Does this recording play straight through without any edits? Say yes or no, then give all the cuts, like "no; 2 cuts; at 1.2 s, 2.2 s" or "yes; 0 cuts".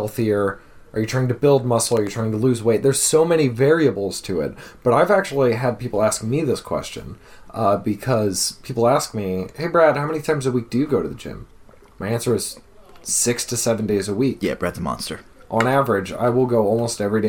yes; 0 cuts